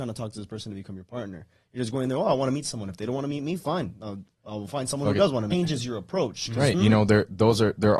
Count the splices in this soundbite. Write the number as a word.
two